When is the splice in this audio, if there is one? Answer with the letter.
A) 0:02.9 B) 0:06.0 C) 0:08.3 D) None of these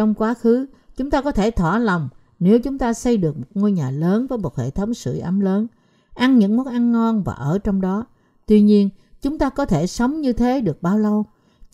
D